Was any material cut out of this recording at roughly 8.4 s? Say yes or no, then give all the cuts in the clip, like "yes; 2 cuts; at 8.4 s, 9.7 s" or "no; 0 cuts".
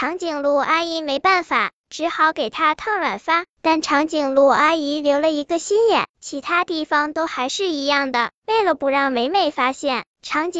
no; 1 cut; at 6.1 s